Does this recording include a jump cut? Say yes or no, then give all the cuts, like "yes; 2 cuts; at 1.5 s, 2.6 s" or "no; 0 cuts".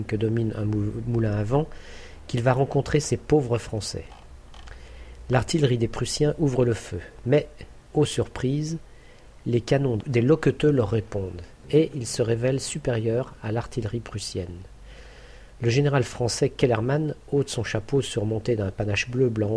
no; 0 cuts